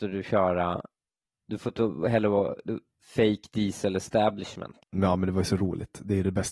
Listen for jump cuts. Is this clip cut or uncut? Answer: cut